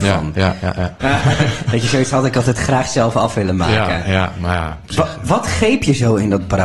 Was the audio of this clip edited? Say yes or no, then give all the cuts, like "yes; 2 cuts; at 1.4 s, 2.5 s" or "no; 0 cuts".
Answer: yes; 1 cut; at 1.0 s